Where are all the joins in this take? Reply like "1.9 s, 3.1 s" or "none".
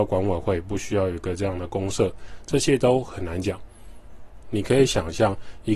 4.4 s